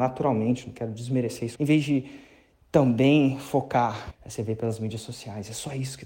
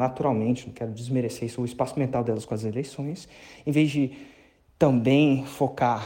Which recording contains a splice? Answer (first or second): first